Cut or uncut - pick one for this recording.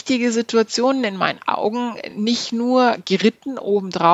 uncut